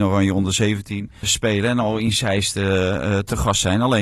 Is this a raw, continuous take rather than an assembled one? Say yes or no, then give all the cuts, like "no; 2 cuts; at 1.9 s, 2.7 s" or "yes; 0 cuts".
no; 1 cut; at 1.2 s